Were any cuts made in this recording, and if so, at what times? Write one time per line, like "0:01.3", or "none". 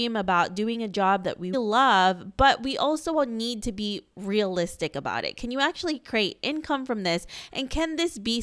0:01.5